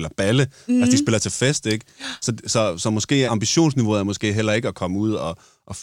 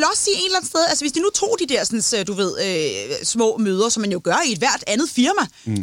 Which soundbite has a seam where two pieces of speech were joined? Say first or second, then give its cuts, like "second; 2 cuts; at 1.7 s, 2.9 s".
first; 1 cut; at 3.3 s